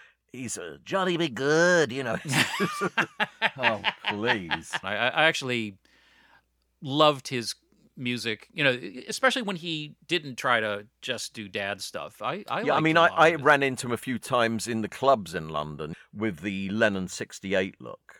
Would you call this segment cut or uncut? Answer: cut